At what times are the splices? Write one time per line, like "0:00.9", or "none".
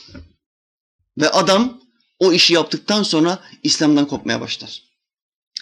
0:01.0